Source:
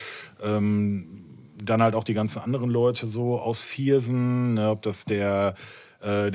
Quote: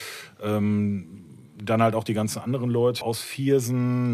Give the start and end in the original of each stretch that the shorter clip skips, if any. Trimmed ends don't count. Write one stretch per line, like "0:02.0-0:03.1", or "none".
0:03.0-0:03.4